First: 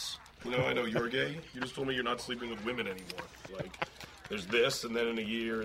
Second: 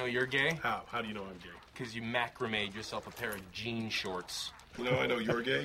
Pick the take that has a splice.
first; 1 cut; at 3.5 s

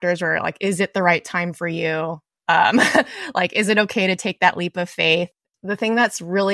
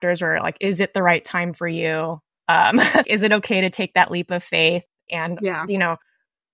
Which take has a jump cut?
second; 2 cuts; at 3.0 s, 5.1 s

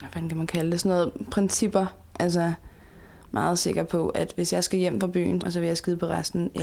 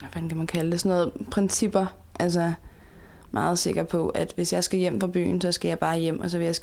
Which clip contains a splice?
first; 1 cut; at 5.4 s

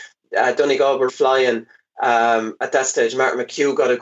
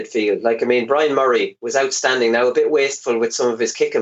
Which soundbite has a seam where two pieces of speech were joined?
first; 1 cut; at 1.1 s

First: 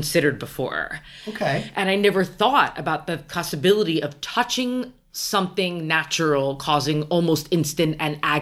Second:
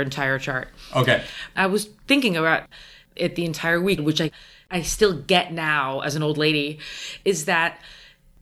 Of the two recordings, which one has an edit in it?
second; 1 cut; at 4.0 s

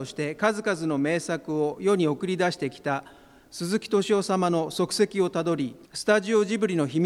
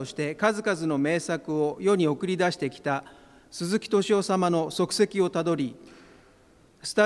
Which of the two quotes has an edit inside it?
first; 1 cut; at 5.8 s

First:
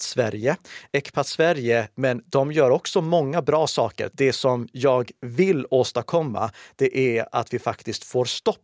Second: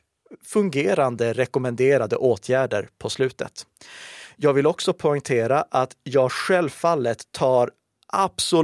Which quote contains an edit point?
first; 2 cuts; at 1.9 s, 4.1 s

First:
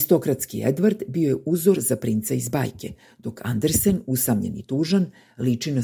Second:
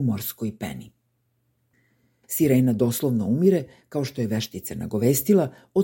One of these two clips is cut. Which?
second; 1 cut; at 2.2 s

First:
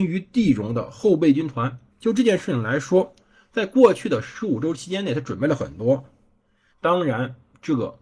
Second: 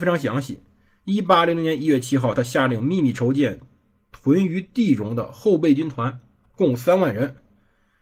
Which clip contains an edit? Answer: first; 2 cuts; at 1.9 s, 6.7 s

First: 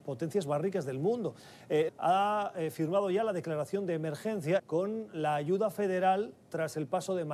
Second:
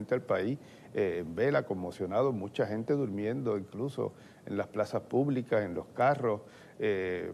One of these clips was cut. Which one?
first; 2 cuts; at 1.9 s, 4.6 s

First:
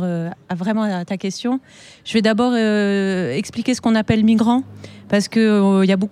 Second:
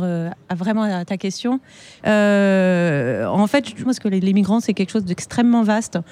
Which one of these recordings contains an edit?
second; 2 cuts; at 2.0 s, 3.9 s

